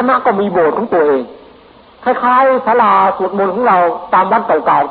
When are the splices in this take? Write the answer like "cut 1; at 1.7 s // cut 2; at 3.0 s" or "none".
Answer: none